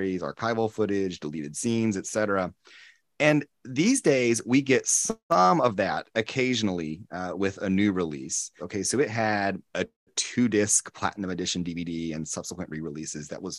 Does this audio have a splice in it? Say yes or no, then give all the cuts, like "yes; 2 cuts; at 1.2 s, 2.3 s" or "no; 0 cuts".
yes; 2 cuts; at 8.6 s, 9.7 s